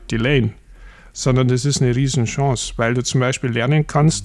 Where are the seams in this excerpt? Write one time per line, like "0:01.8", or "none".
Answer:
none